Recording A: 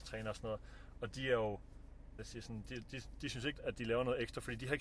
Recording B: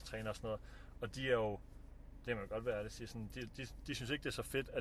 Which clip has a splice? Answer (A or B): A